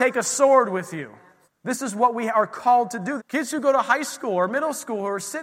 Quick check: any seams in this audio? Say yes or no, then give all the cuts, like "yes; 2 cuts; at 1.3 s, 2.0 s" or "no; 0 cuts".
yes; 2 cuts; at 1.4 s, 3.2 s